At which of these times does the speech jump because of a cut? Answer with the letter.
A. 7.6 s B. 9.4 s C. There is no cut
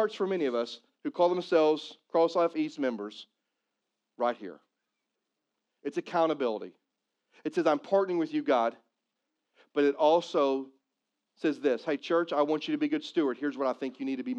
C